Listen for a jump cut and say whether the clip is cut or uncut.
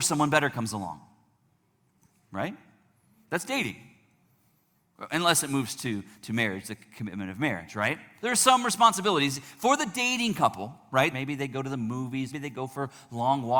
cut